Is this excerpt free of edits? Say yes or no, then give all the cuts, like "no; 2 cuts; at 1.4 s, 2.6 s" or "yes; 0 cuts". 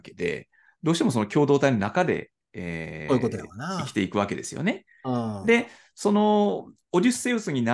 yes; 0 cuts